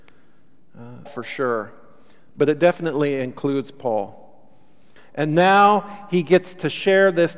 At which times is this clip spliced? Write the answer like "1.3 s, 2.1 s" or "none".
1.1 s, 5.0 s